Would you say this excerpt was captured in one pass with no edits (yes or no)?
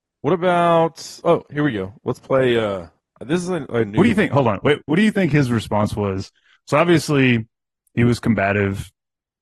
yes